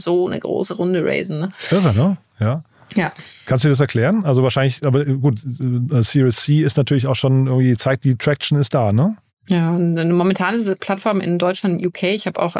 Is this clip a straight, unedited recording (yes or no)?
yes